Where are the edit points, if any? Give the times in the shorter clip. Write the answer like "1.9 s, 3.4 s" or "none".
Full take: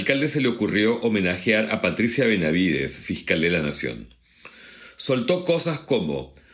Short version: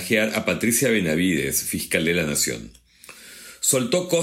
none